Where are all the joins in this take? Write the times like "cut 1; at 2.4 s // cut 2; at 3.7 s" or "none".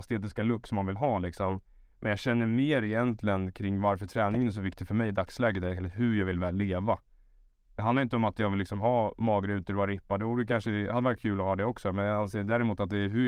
none

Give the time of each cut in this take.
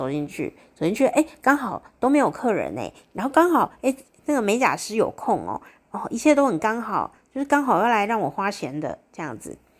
none

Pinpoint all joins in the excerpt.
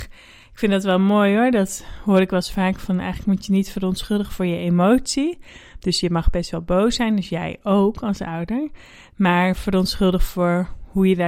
none

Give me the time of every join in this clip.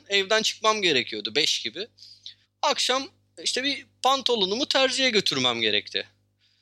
cut 1; at 2.4 s

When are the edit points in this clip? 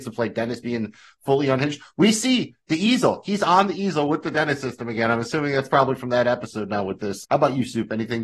cut 1; at 7.2 s

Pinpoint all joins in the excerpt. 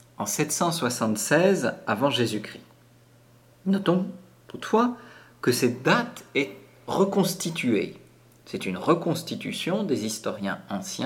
none

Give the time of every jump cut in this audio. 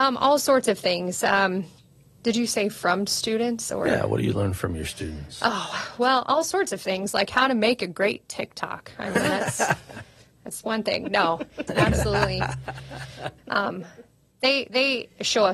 cut 1; at 11.7 s // cut 2; at 13.4 s

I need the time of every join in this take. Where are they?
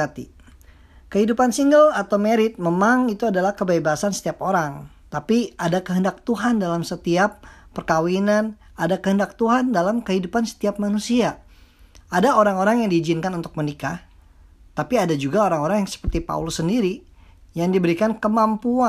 none

